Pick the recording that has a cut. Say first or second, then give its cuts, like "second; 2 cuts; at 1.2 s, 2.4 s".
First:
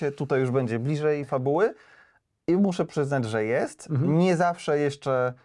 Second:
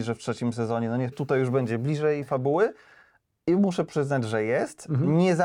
second; 1 cut; at 1.1 s